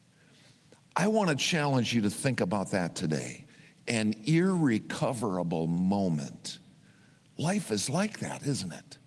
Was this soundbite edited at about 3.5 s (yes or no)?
no